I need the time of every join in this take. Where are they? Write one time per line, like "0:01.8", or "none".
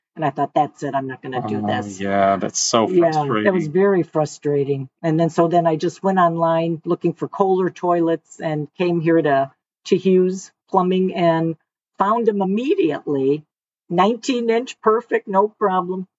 none